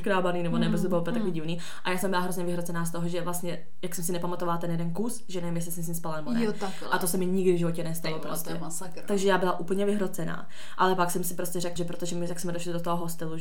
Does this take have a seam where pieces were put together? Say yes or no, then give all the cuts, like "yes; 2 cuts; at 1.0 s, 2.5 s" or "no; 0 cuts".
yes; 1 cut; at 11.8 s